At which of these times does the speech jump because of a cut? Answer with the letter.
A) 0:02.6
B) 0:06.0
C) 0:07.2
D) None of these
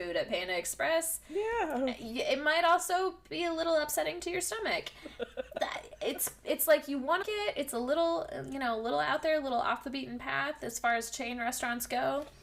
C